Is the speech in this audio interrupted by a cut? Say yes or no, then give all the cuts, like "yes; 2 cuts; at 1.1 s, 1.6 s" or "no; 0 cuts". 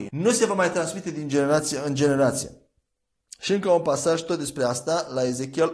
no; 0 cuts